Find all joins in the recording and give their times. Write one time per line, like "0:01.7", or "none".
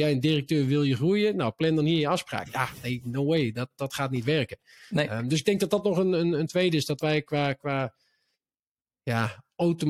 none